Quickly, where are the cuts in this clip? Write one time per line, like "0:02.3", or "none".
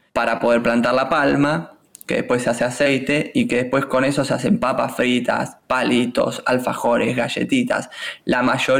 none